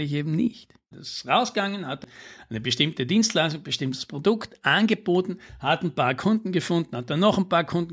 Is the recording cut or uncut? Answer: cut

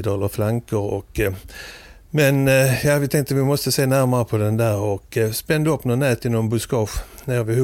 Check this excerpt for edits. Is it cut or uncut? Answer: uncut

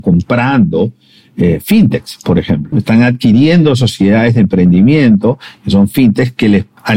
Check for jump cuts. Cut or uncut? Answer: cut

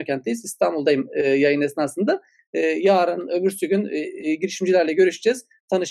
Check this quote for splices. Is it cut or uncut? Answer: uncut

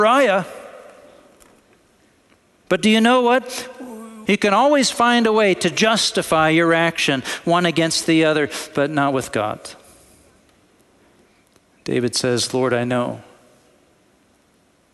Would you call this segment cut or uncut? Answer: cut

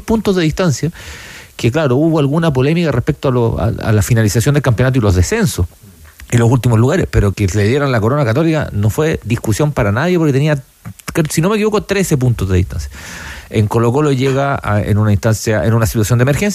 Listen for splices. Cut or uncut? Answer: cut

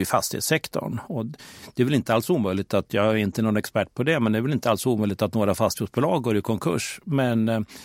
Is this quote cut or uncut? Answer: uncut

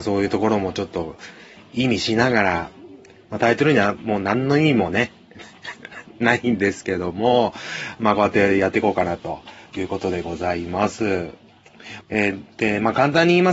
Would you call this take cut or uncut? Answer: cut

